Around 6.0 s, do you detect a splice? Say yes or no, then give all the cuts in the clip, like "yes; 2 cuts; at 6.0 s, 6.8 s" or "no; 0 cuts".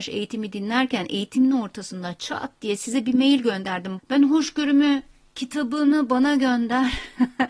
no; 1 cut; at 4.0 s